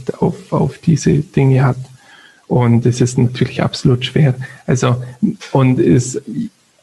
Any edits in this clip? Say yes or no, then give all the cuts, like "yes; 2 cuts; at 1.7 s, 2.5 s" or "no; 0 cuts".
no; 0 cuts